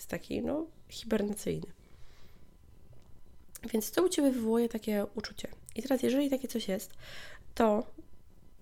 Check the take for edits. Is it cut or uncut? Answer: uncut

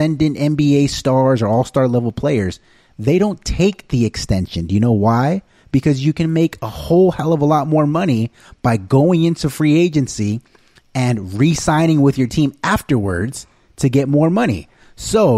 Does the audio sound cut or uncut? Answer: uncut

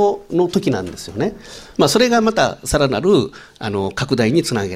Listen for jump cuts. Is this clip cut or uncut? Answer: cut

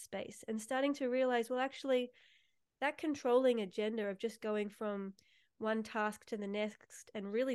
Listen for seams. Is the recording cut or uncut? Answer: uncut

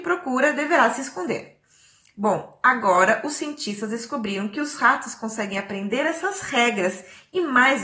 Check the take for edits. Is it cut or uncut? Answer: uncut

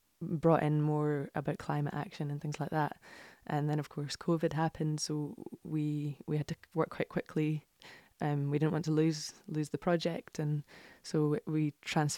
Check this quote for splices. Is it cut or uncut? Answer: uncut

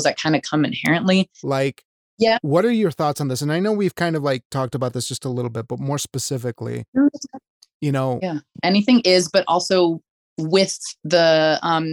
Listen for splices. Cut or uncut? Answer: cut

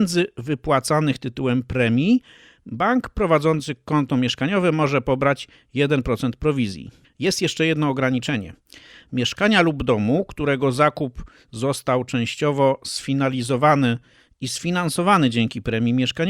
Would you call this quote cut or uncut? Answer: uncut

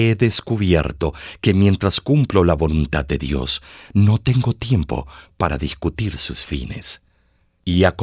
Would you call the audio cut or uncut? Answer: uncut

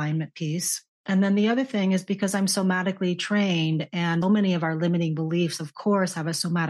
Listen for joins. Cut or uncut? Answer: cut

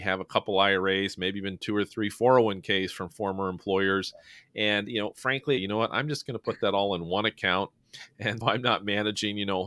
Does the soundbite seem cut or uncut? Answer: cut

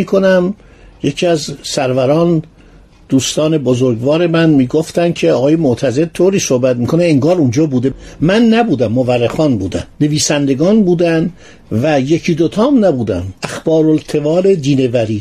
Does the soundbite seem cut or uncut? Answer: cut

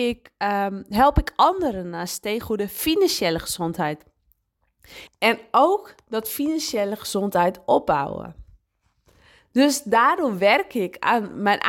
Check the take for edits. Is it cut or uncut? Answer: cut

